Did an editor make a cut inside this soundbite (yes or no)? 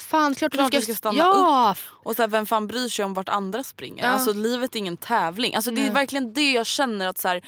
no